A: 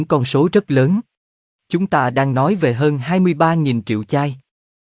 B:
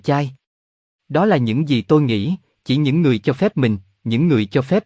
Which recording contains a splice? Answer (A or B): A